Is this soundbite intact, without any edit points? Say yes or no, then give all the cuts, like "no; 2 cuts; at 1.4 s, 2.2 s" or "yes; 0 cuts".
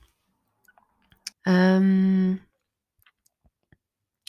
no; 1 cut; at 1.3 s